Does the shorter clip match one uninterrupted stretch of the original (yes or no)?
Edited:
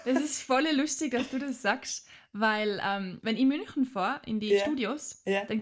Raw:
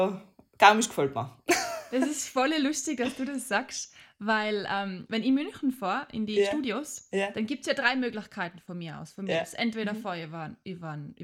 yes